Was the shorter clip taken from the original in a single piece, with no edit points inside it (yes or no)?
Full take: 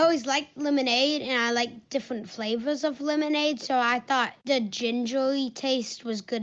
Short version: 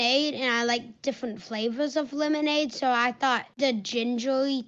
yes